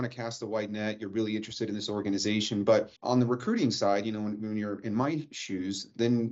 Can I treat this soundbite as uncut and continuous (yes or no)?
no